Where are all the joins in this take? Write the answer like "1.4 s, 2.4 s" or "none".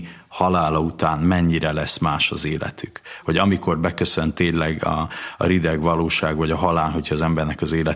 none